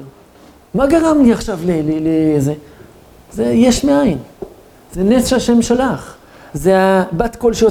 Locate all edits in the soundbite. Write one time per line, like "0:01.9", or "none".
none